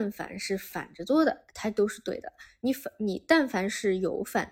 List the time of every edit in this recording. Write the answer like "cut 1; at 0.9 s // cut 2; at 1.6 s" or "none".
none